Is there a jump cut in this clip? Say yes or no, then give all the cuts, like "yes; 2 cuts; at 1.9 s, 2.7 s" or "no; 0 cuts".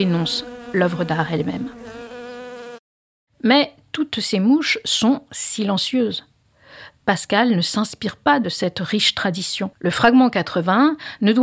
yes; 1 cut; at 9.7 s